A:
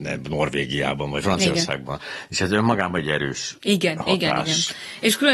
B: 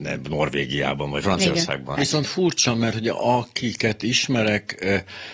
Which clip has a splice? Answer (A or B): B